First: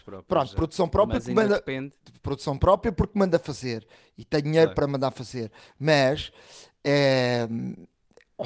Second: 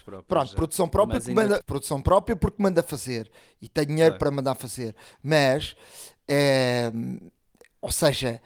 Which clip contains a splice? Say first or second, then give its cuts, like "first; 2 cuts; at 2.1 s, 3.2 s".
second; 1 cut; at 1.6 s